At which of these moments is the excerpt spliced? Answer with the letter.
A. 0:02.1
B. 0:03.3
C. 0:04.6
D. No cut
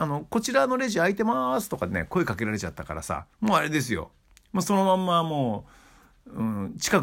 B